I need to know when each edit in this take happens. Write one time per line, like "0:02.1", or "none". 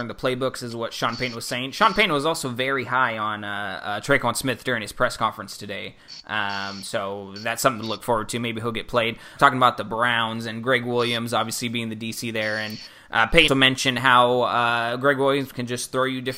0:09.4
0:13.5